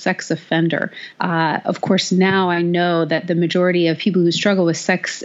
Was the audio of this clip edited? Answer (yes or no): yes